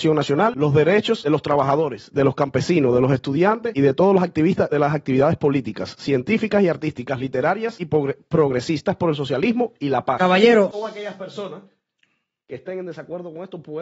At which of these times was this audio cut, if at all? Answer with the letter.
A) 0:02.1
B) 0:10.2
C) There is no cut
C